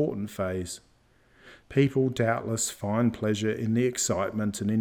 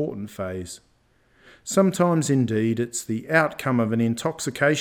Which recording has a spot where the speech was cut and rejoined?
first; 1 cut; at 1.6 s

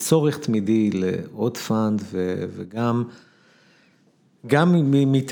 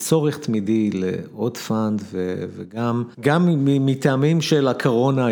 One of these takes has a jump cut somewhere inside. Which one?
second; 1 cut; at 3.1 s

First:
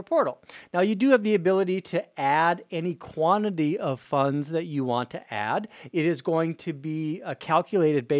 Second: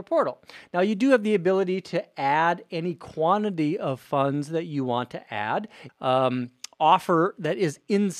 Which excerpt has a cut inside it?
second; 1 cut; at 5.9 s

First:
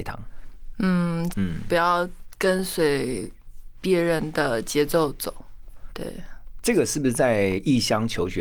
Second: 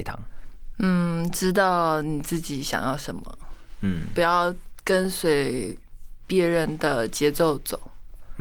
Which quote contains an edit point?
first; 2 cuts; at 1.3 s, 5.9 s

